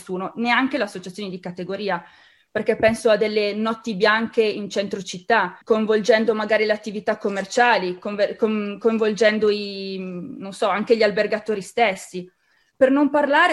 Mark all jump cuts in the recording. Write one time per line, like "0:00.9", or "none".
0:05.6

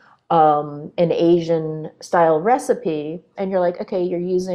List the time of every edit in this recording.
0:03.4

